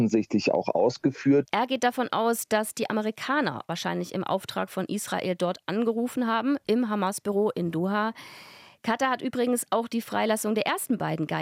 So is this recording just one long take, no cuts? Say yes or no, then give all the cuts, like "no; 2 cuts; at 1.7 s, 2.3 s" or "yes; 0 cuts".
no; 1 cut; at 1.5 s